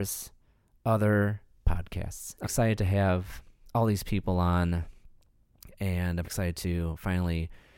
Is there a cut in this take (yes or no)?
yes